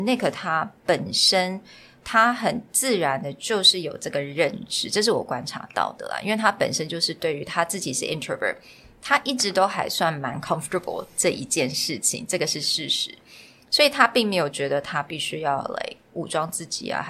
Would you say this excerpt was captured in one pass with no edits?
yes; 0 cuts

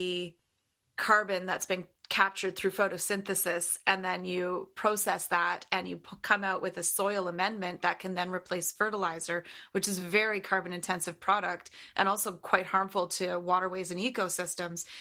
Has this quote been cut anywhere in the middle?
no; 0 cuts

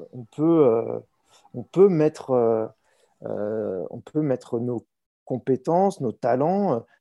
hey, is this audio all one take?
yes; 0 cuts

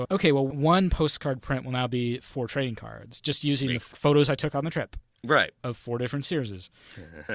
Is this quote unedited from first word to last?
yes; 0 cuts

